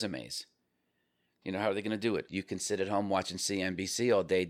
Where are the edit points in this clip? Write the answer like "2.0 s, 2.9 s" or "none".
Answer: 2.3 s